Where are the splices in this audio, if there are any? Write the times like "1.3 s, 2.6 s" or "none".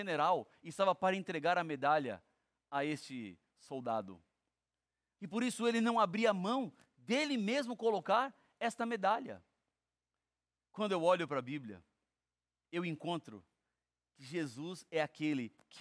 5.2 s, 12.6 s